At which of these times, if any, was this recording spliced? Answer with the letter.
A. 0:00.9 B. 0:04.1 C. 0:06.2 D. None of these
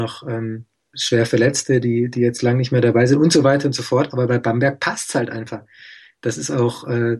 A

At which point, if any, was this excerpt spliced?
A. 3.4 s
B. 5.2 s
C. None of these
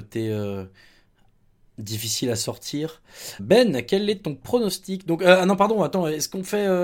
A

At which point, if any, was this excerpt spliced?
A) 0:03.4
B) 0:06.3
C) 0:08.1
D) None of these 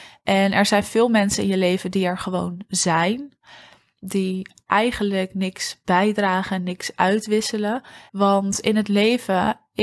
C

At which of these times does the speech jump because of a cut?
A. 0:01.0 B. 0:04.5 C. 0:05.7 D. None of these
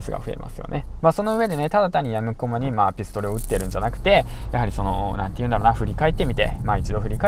A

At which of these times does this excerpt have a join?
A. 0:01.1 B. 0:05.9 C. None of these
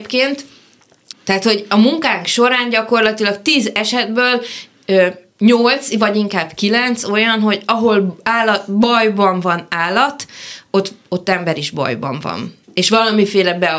A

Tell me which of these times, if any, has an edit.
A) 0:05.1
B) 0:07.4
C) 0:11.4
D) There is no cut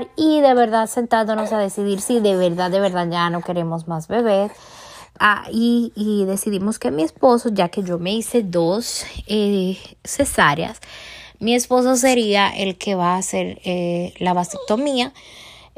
A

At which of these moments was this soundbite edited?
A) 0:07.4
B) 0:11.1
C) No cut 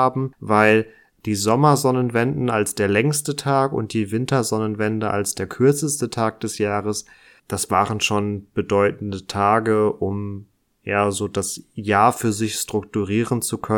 A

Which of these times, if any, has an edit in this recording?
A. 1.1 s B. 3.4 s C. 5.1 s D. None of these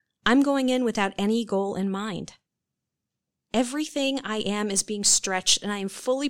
D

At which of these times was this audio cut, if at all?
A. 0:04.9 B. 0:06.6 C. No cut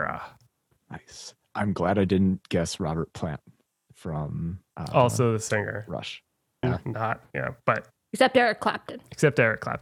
B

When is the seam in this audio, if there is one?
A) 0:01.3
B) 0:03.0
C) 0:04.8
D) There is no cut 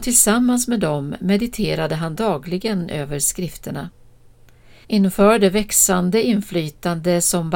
C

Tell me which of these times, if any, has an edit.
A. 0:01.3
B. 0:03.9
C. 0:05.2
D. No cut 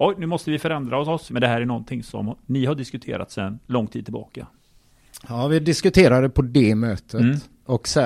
A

